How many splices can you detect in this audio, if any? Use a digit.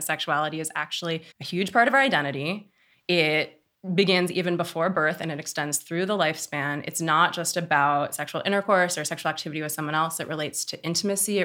1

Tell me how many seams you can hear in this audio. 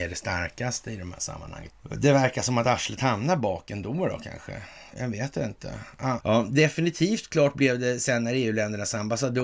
2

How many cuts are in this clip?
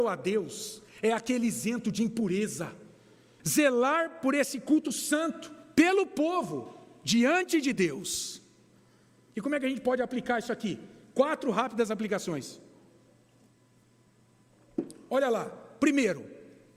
1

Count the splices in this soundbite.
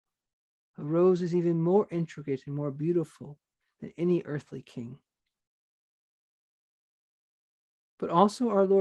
0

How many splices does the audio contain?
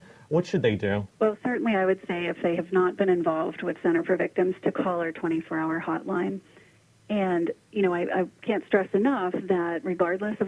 1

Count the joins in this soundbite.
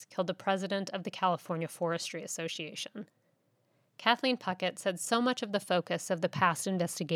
0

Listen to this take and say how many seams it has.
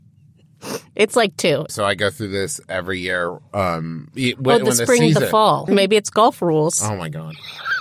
2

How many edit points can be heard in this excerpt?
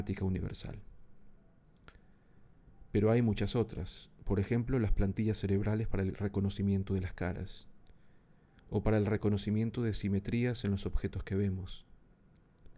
0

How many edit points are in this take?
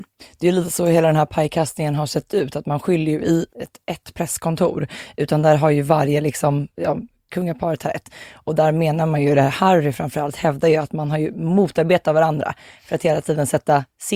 2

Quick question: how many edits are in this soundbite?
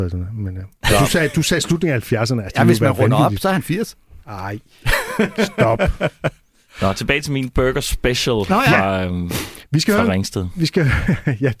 1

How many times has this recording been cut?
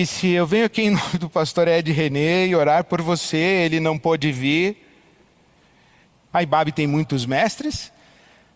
1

